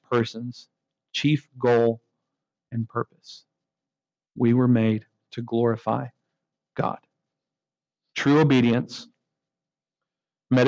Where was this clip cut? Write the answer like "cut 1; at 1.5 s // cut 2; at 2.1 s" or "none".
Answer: cut 1; at 4.2 s // cut 2; at 8.1 s